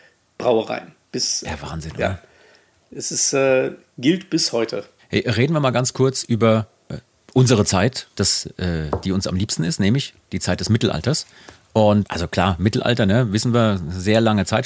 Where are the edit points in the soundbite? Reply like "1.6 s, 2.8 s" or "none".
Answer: 12.0 s